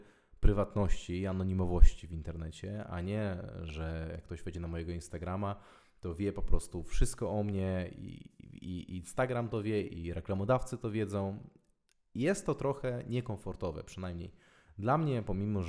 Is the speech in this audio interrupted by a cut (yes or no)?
no